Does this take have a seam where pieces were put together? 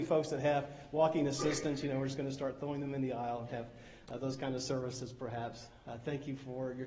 no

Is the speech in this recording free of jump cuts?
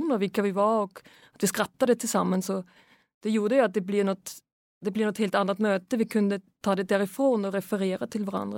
yes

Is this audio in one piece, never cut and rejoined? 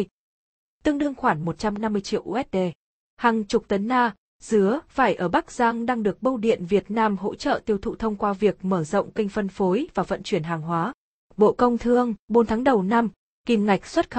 yes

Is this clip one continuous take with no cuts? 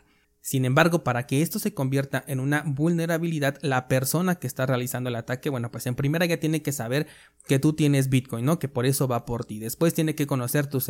yes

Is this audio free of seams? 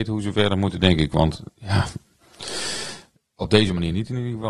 yes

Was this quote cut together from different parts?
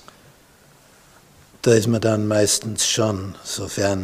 no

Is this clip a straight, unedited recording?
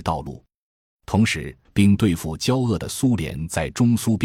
no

